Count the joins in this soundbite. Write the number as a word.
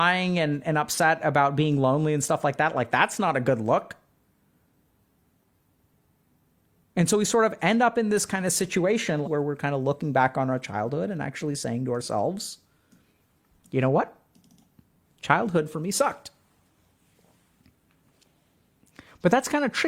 one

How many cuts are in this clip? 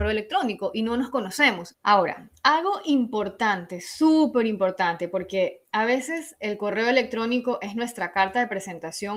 one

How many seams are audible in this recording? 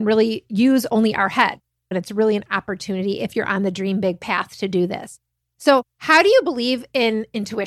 one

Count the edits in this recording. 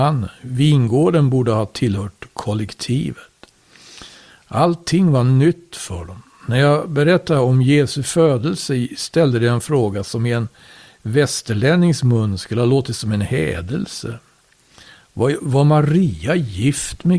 zero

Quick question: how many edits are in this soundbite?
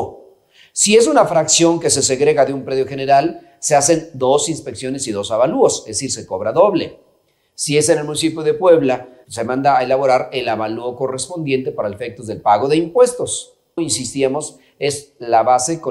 two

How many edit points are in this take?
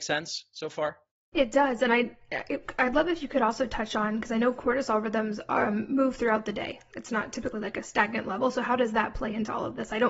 zero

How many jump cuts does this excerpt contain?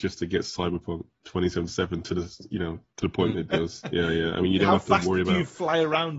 one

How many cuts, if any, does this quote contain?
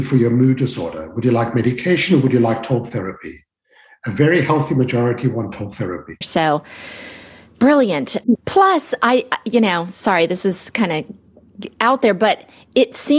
two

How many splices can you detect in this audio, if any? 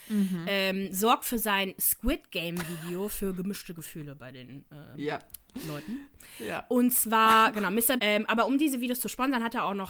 one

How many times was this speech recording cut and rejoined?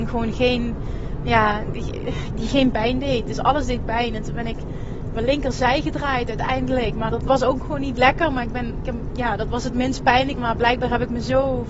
three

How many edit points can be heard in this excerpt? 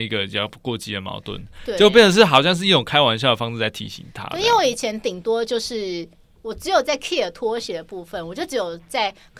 zero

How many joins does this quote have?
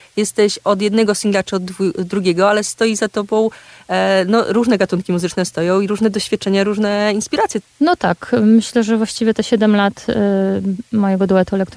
one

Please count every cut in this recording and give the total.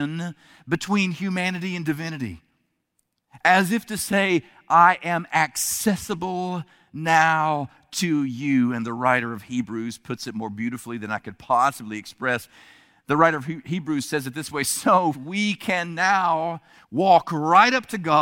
two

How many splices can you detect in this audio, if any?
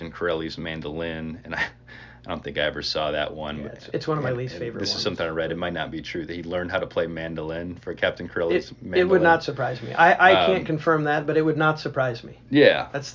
zero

